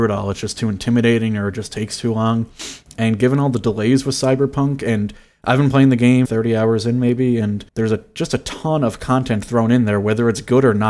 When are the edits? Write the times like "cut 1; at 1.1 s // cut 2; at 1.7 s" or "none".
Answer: cut 1; at 6.2 s // cut 2; at 7.7 s